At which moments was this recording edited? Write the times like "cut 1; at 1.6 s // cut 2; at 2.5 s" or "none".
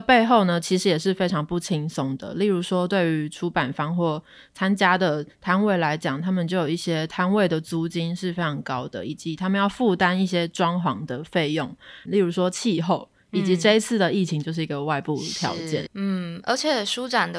cut 1; at 12.1 s // cut 2; at 15.9 s